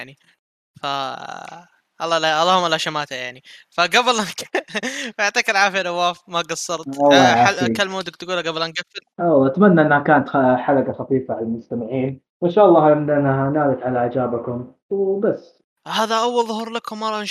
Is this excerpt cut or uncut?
cut